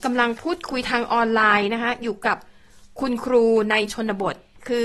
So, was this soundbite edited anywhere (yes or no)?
no